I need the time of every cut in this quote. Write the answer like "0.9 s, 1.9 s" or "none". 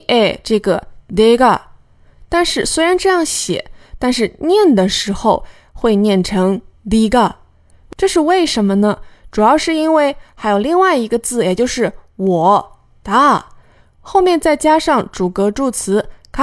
none